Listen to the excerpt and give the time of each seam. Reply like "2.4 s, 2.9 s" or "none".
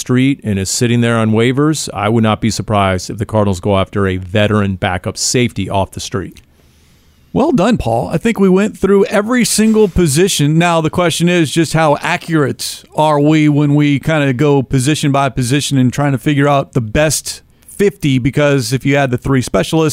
none